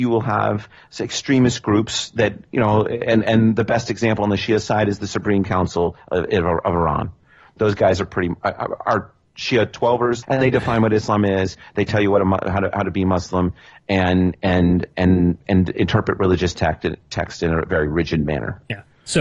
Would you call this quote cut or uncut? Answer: cut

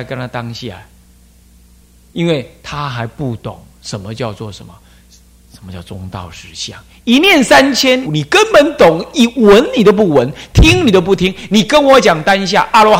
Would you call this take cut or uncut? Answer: cut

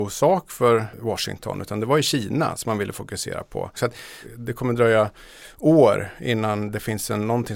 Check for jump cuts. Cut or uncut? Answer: cut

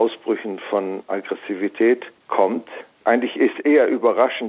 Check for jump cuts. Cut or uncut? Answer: uncut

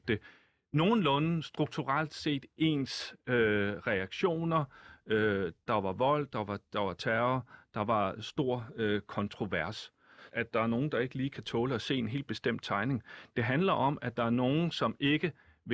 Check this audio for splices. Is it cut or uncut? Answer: cut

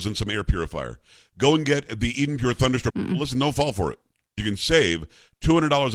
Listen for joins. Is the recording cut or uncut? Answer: cut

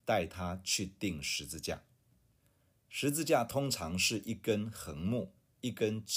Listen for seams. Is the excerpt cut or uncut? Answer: uncut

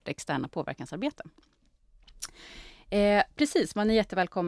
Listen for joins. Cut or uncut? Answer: uncut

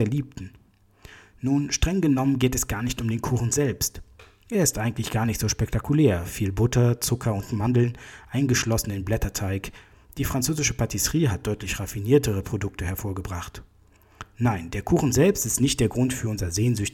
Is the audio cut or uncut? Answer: uncut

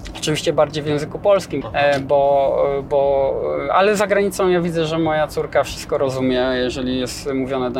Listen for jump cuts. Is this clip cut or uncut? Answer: cut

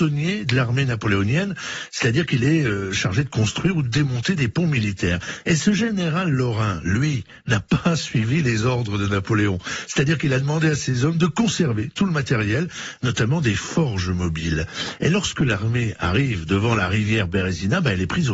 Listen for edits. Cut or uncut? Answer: uncut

